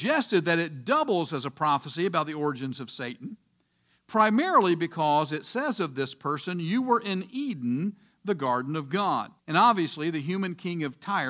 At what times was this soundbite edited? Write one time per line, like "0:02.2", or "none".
0:09.4